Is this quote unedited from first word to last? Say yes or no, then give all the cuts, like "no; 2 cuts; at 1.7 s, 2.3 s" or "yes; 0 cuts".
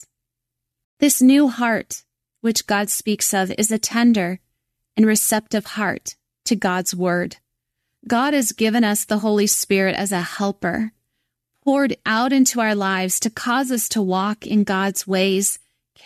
yes; 0 cuts